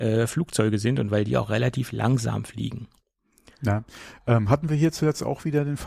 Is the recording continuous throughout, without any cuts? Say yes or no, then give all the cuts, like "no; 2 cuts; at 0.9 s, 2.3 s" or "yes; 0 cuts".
yes; 0 cuts